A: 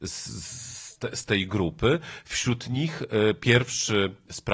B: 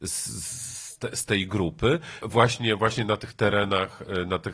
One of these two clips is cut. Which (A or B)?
B